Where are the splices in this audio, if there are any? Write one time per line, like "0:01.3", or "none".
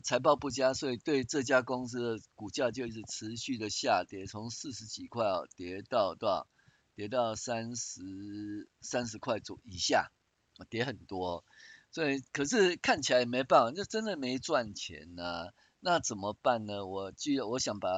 none